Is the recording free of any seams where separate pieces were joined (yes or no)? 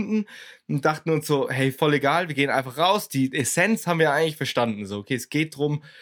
yes